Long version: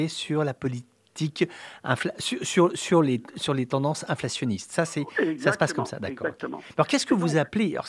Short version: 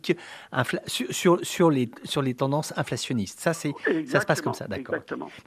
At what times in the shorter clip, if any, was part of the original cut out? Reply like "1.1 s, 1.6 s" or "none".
none